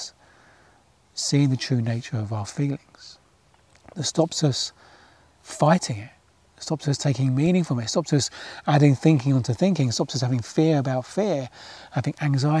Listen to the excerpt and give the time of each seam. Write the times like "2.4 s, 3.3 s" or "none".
none